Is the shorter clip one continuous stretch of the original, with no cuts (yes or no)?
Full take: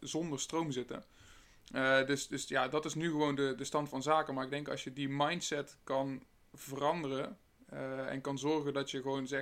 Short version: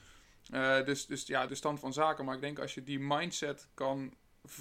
no